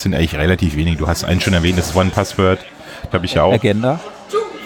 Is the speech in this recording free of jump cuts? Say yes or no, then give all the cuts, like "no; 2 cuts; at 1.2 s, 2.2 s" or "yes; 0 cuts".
no; 1 cut; at 3.1 s